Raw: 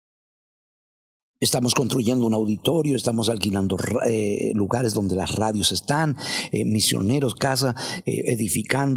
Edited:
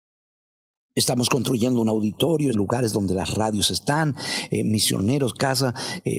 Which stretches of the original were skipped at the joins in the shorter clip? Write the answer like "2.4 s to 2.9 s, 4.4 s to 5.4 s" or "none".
3.0 s to 4.5 s